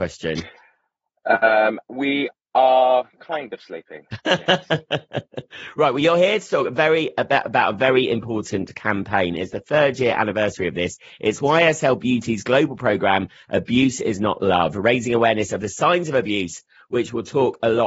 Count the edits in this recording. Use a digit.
0